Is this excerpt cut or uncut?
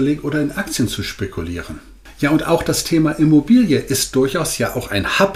uncut